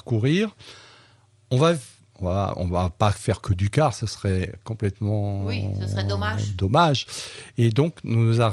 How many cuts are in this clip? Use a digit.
0